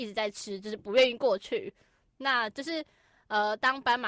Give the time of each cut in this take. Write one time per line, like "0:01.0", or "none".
none